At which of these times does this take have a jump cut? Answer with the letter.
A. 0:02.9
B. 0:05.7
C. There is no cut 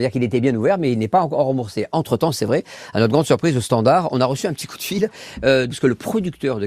B